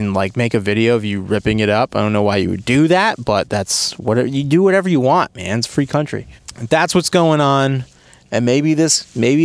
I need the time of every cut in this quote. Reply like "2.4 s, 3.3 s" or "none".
8.2 s